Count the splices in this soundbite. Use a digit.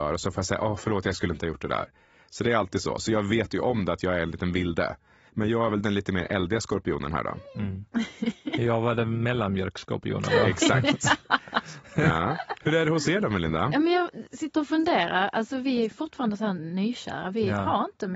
1